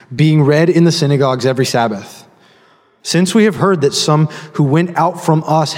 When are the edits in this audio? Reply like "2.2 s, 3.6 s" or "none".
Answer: 3.0 s